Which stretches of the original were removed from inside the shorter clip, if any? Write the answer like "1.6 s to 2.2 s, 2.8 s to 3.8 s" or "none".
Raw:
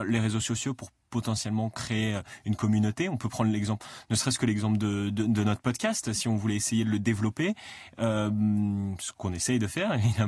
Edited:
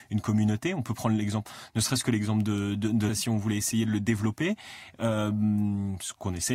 5.4 s to 6.1 s